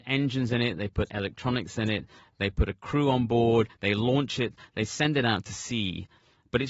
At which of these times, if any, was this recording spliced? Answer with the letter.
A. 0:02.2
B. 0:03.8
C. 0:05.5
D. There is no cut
D